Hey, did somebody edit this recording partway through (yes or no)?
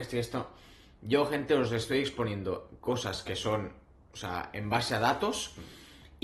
no